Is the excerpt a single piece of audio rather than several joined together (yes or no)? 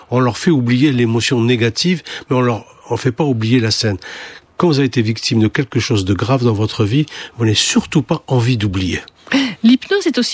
yes